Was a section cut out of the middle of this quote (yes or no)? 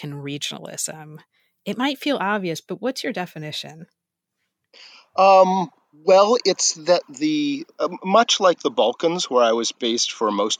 no